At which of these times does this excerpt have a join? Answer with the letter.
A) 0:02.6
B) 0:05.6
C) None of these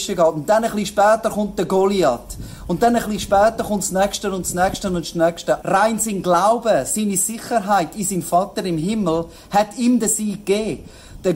B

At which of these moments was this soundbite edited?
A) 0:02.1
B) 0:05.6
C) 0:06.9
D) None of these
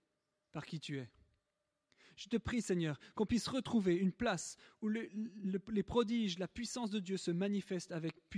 D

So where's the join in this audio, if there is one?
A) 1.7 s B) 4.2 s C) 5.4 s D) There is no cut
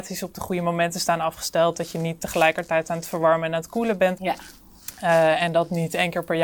B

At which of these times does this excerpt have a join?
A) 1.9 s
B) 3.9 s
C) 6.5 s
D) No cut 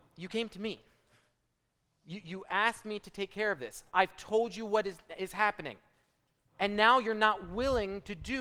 B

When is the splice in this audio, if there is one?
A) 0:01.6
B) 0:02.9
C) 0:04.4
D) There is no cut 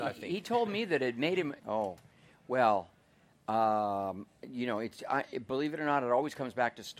A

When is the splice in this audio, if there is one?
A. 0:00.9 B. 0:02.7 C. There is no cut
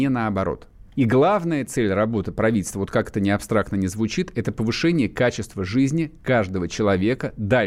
A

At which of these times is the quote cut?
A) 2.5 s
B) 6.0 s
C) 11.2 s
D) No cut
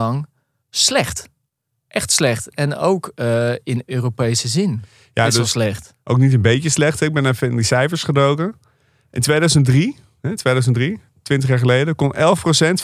D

